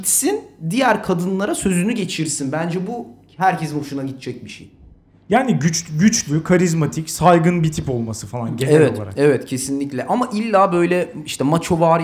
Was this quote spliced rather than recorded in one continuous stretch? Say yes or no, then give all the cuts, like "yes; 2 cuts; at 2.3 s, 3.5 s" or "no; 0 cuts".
no; 0 cuts